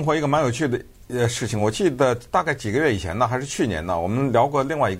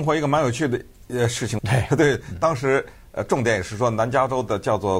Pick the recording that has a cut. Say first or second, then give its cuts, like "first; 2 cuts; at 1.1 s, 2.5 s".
second; 1 cut; at 1.6 s